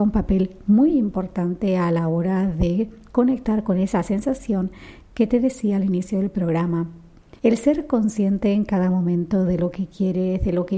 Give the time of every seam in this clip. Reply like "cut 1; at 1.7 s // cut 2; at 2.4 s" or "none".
cut 1; at 7.4 s